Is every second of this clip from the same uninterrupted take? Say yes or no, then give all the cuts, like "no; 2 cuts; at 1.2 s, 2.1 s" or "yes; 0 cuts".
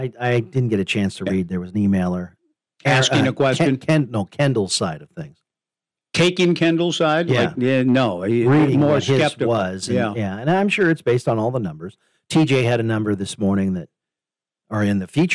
yes; 0 cuts